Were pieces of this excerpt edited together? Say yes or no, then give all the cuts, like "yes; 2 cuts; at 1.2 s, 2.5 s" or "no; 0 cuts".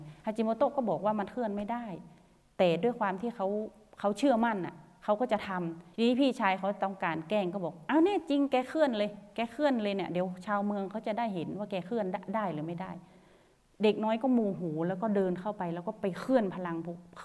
yes; 1 cut; at 5.9 s